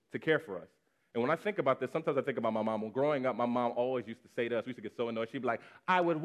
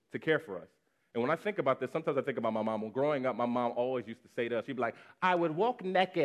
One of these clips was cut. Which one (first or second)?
second